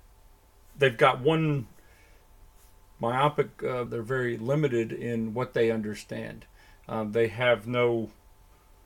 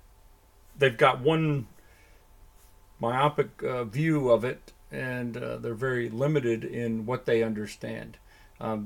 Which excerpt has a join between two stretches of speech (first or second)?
first